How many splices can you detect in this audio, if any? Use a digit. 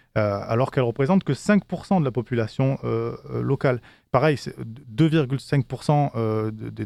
0